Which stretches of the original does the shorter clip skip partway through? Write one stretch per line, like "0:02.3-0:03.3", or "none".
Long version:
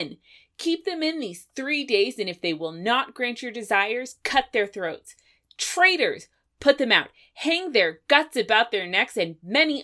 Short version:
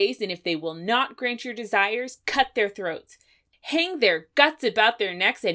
0:05.5-0:07.3